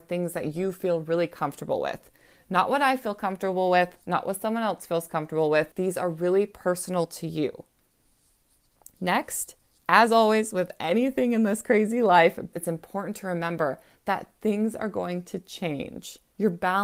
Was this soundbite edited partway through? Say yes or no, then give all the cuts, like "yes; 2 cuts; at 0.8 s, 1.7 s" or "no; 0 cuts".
yes; 2 cuts; at 5.7 s, 12.5 s